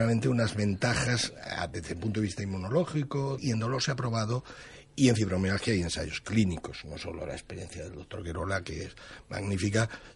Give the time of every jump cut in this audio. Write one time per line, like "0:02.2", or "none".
0:03.4